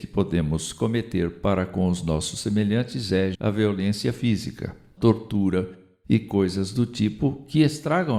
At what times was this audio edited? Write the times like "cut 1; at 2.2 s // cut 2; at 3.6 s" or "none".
cut 1; at 3.3 s // cut 2; at 5.0 s